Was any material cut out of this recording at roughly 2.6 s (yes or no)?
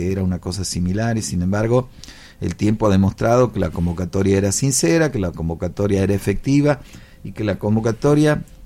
no